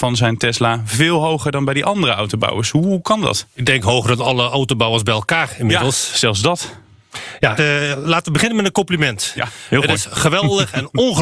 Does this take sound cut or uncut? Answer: cut